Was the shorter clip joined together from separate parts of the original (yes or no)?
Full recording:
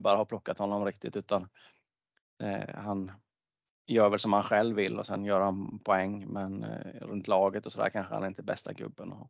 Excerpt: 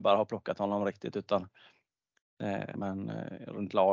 yes